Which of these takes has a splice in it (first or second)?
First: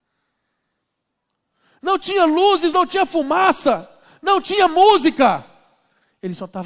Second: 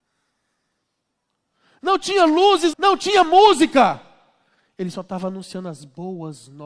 second